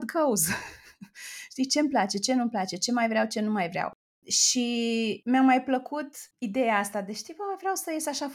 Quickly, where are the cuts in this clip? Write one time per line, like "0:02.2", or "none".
none